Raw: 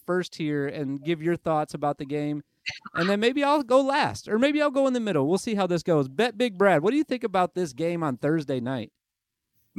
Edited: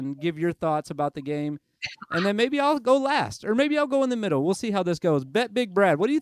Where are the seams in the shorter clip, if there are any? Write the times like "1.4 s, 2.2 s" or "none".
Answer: none